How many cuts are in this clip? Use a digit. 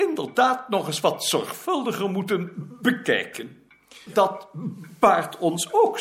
1